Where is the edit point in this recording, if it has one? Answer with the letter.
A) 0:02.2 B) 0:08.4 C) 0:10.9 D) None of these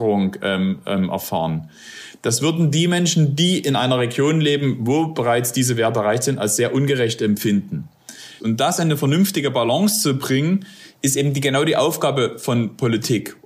B